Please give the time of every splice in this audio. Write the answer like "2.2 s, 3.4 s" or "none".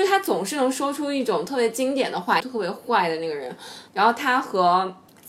2.4 s, 3.9 s